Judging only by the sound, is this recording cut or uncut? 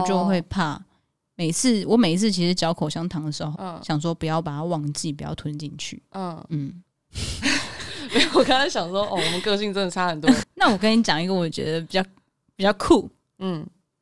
cut